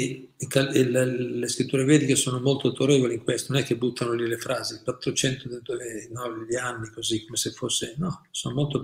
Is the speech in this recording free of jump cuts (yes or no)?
yes